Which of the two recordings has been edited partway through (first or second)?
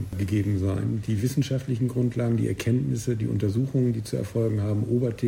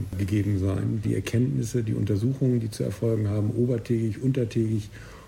second